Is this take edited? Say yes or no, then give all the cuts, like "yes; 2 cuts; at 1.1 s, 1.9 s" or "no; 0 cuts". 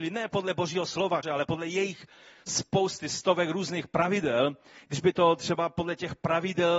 yes; 1 cut; at 1.2 s